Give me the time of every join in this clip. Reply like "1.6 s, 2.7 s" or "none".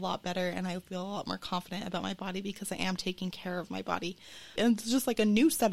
4.6 s